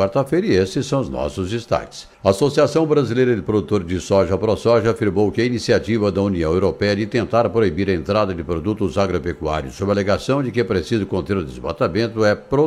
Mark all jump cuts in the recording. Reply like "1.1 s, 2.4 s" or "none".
2.1 s